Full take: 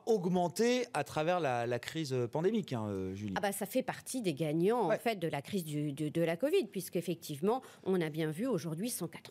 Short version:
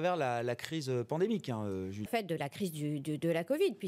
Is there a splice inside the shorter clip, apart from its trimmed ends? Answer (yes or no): yes